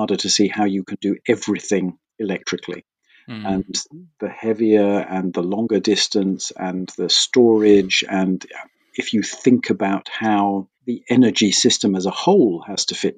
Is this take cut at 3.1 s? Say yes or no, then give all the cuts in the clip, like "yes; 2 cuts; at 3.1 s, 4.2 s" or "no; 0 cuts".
no; 1 cut; at 10.7 s